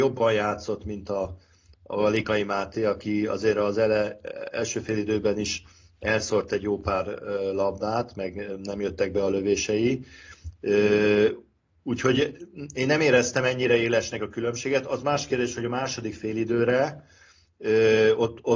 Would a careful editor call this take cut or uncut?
uncut